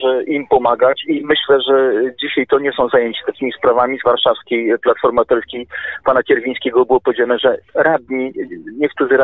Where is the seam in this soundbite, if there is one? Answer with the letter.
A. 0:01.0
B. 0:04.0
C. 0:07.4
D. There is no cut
B